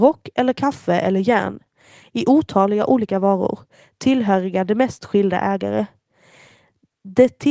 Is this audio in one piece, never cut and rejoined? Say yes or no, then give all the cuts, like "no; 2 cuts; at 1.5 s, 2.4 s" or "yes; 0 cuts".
yes; 0 cuts